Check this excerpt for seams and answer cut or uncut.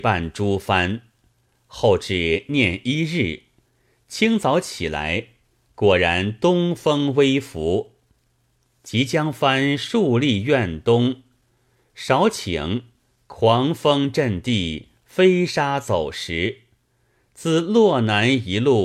uncut